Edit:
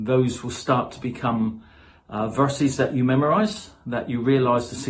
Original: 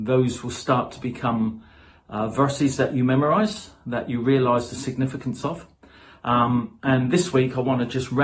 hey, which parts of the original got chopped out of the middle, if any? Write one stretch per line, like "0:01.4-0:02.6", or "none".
none